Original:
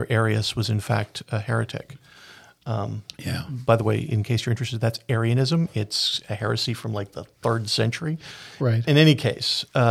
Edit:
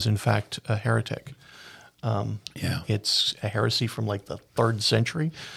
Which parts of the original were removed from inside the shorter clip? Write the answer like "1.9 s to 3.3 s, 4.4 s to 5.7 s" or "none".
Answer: 3.5 s to 5.7 s